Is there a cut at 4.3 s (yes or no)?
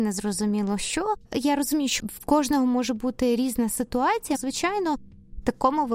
yes